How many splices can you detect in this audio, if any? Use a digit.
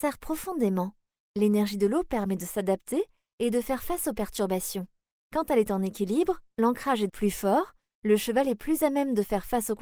1